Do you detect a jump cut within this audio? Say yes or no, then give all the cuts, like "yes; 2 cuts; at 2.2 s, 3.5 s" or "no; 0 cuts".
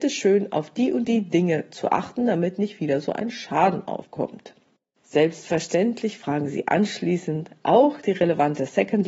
yes; 1 cut; at 4.9 s